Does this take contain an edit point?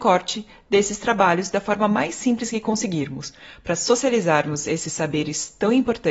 no; 0 cuts

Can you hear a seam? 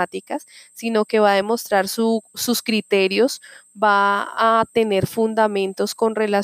no; 0 cuts

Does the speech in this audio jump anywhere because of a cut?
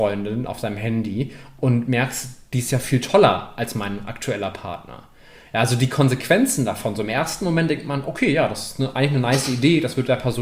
no; 0 cuts

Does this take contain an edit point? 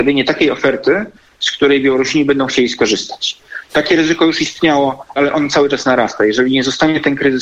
yes; 2 cuts; at 3.7 s, 5.2 s

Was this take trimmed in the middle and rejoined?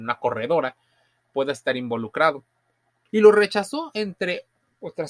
yes; 1 cut; at 3.1 s

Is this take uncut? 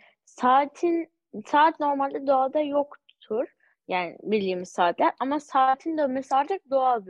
yes; 0 cuts

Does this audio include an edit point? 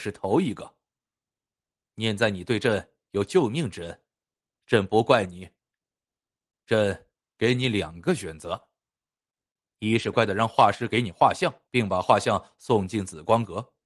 yes; 2 cuts; at 10.1 s, 11.7 s

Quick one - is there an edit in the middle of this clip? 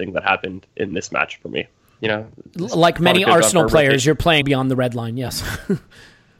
yes; 2 cuts; at 2.0 s, 4.4 s

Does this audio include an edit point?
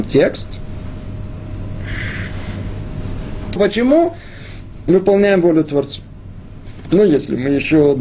yes; 1 cut; at 3.6 s

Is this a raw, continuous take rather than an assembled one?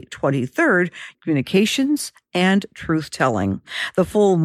no; 1 cut; at 1.1 s

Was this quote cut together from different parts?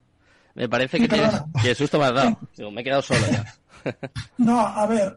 yes; 1 cut; at 1.5 s

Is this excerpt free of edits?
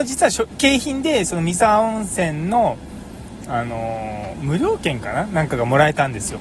yes; 0 cuts

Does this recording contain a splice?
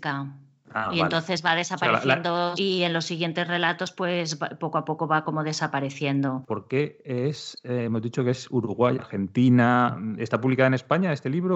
yes; 3 cuts; at 2.6 s, 6.5 s, 9.0 s

